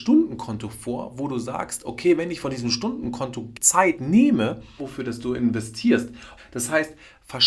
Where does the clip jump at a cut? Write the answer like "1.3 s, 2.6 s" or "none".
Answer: 4.8 s, 6.4 s